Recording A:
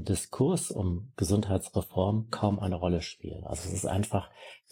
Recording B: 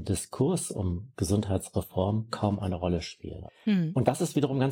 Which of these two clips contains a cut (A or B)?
B